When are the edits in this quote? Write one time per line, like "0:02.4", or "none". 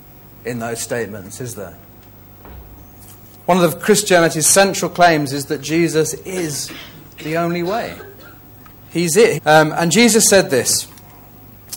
0:09.4